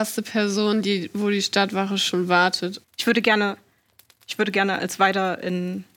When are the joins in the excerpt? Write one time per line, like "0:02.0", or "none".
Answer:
0:02.8